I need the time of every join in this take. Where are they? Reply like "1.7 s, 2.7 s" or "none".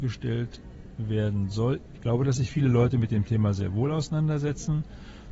1.9 s